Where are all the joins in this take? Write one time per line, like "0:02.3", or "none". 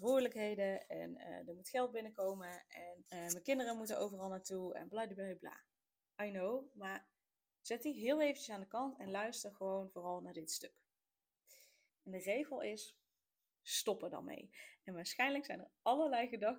0:03.1
0:11.9
0:13.6